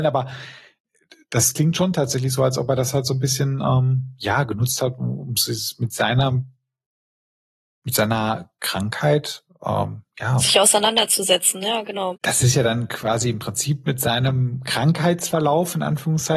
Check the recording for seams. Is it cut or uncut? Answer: cut